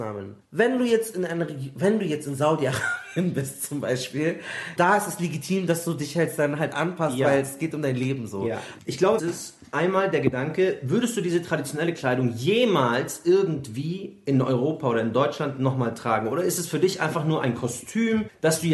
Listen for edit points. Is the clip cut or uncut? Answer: cut